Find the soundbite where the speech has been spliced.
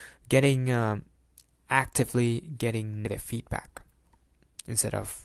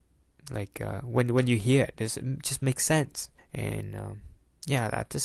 second; 1 cut; at 3.4 s

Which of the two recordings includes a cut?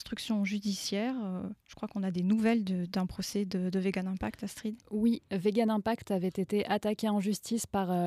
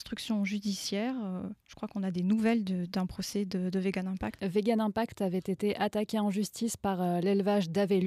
second; 1 cut; at 4.4 s

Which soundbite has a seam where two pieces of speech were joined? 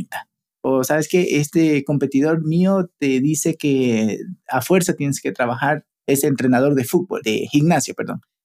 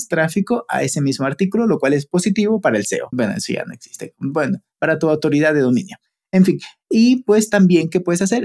second; 1 cut; at 3.1 s

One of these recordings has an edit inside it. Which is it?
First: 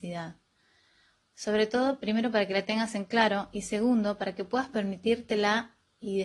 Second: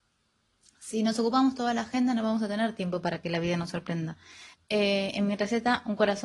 second; 1 cut; at 4.5 s

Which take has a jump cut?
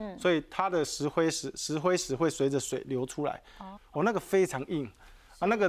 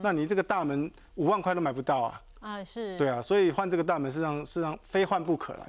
first; 1 cut; at 3.8 s

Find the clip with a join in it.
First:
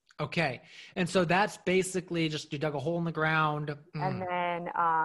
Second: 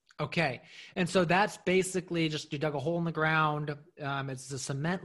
first; 1 cut; at 3.9 s

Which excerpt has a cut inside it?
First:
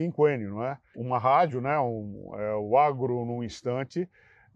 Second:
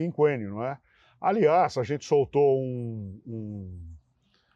first; 1 cut; at 0.9 s

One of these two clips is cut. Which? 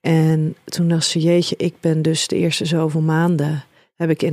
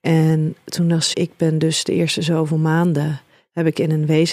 second; 1 cut; at 1.1 s

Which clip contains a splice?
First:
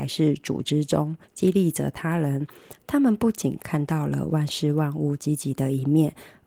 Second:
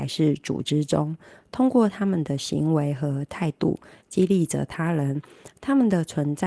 first; 2 cuts; at 1.2 s, 2.8 s

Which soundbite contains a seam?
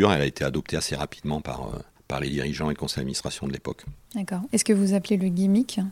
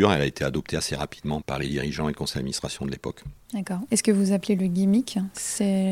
second; 1 cut; at 1.4 s

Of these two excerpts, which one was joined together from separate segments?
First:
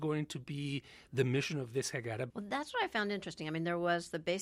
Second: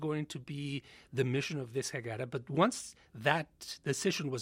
first; 1 cut; at 2.3 s

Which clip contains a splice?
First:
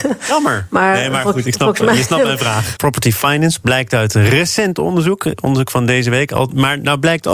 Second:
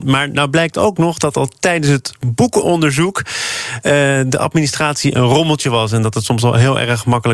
first; 1 cut; at 2.8 s

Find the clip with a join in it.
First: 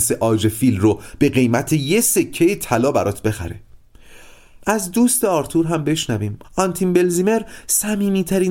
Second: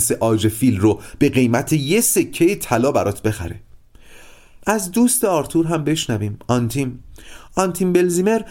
first; 1 cut; at 6.4 s

